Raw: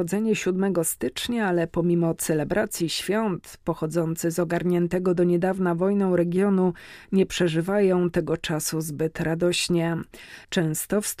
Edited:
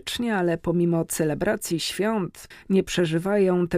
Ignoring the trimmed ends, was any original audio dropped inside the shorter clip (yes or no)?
yes